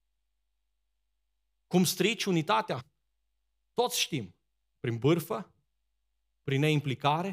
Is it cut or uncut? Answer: uncut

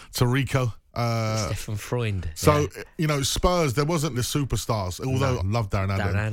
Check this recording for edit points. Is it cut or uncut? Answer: cut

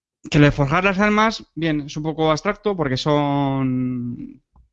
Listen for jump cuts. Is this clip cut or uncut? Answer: cut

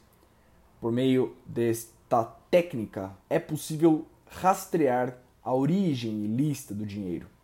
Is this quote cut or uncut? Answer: cut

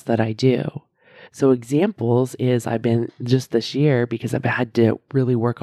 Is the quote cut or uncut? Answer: uncut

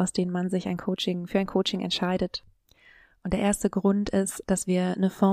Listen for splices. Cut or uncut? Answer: uncut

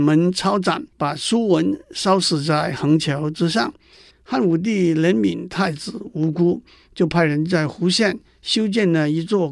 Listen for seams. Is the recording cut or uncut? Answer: cut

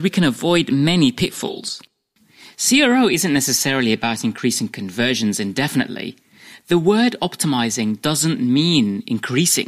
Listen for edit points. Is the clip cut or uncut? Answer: uncut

